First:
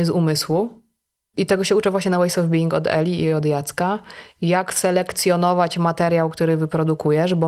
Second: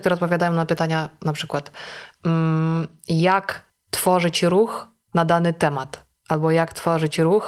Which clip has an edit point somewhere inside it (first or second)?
first